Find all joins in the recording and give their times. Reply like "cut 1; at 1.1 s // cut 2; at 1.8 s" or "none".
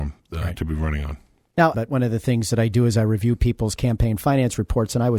cut 1; at 1.7 s

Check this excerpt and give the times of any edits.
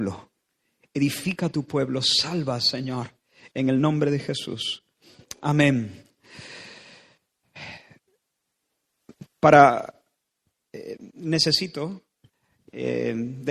none

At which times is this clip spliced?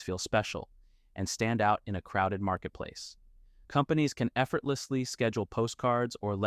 cut 1; at 3.6 s

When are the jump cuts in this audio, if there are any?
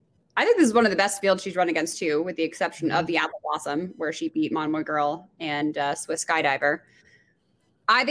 none

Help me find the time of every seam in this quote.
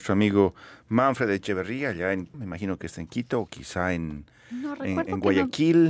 cut 1; at 2.3 s

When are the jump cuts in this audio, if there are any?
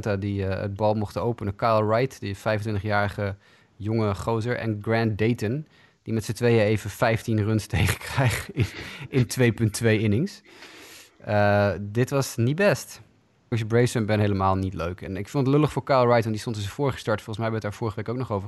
cut 1; at 13.5 s

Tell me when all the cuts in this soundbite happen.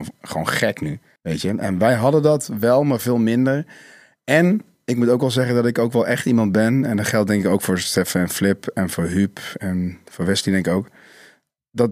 none

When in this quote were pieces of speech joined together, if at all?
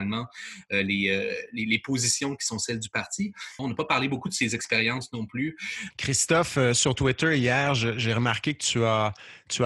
cut 1; at 3.6 s // cut 2; at 5.9 s

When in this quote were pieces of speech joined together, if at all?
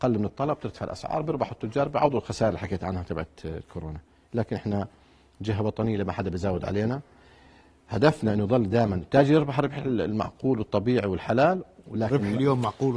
none

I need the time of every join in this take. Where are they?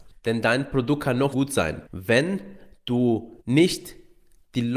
cut 1; at 1.3 s // cut 2; at 3.4 s

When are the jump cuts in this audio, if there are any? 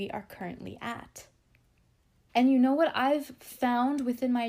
cut 1; at 2.3 s

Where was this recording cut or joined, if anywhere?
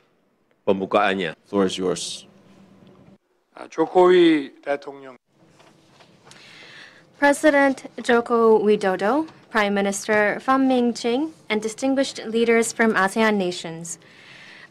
cut 1; at 1.3 s

